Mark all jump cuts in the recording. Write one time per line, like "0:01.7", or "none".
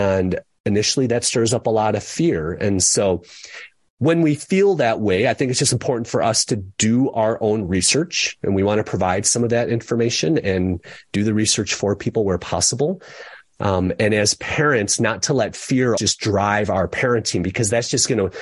0:16.0